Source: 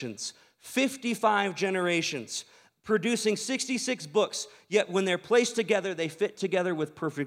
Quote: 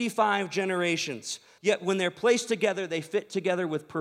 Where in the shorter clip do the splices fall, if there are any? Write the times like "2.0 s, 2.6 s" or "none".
1.6 s